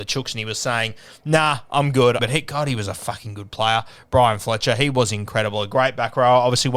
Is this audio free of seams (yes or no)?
no